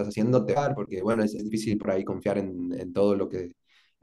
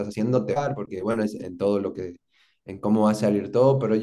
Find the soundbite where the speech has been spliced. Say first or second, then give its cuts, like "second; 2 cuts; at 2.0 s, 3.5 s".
second; 1 cut; at 1.4 s